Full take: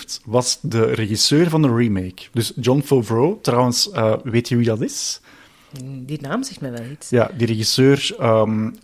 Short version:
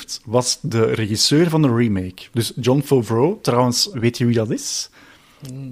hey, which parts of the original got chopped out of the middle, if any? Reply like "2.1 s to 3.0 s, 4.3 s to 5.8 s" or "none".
3.9 s to 4.2 s